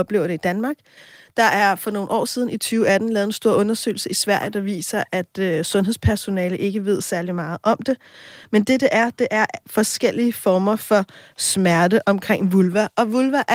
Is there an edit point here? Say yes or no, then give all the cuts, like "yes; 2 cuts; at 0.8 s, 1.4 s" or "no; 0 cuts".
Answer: no; 0 cuts